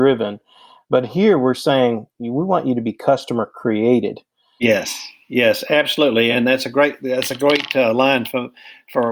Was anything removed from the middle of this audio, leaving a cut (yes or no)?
no